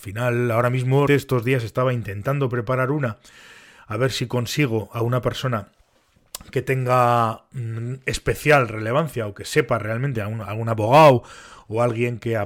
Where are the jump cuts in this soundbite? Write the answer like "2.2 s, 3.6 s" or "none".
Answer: 1.1 s

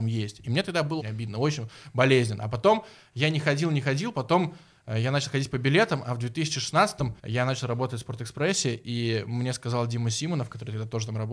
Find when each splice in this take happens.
1.0 s, 7.2 s

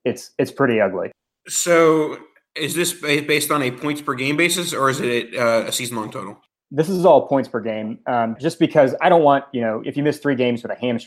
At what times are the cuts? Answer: 8.4 s

